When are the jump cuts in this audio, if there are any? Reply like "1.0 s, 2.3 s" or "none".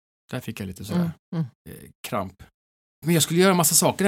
3.0 s